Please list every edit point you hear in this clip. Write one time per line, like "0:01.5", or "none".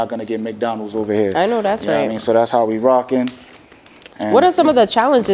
0:04.1

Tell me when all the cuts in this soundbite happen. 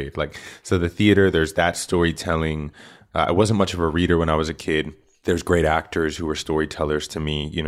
none

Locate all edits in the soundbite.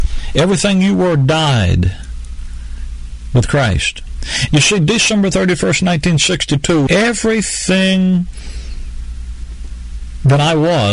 0:04.5
0:06.9

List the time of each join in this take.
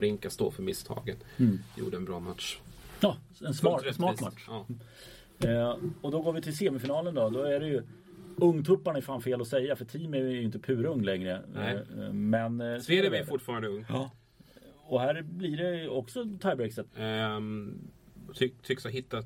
0:16.9

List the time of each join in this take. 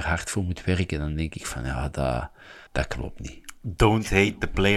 0:02.7

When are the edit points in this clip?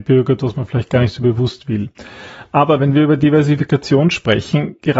none

